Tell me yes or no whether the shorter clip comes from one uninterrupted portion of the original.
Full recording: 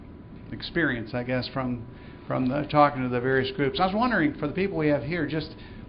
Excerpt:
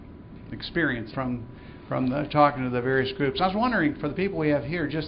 no